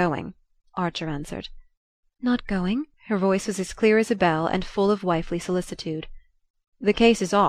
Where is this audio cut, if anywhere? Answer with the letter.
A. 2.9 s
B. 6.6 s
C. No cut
A